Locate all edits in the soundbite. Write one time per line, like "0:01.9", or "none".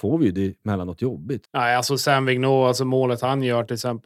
0:01.4